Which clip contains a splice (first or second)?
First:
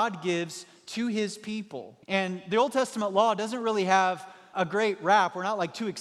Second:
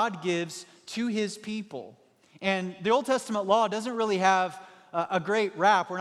first